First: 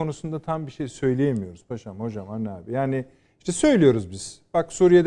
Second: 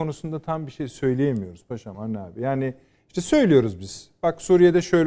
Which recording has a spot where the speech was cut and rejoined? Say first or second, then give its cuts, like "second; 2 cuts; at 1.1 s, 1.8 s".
second; 1 cut; at 1.9 s